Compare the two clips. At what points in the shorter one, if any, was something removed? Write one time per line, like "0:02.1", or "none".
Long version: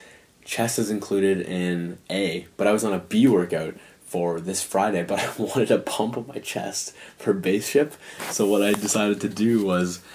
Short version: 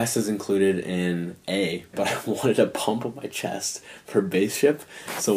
0:01.9